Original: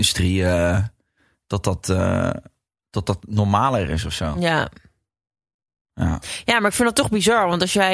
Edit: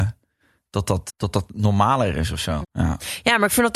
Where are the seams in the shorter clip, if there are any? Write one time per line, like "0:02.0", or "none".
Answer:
0:01.1
0:02.6